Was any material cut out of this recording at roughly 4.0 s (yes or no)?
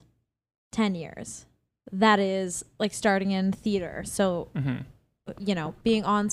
no